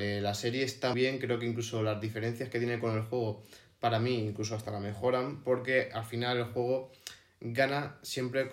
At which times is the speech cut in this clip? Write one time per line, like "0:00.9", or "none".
0:00.9